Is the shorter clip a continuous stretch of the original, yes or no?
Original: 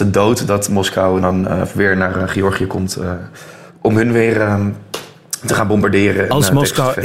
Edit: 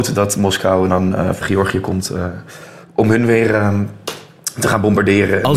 no